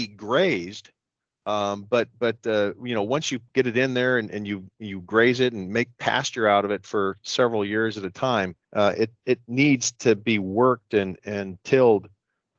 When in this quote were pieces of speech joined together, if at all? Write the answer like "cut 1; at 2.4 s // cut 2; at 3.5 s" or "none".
cut 1; at 8.6 s